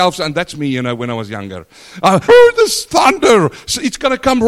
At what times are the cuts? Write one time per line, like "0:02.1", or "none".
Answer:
0:02.3